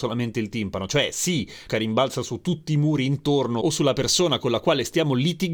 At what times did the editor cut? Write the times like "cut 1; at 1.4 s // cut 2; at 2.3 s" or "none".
cut 1; at 1.7 s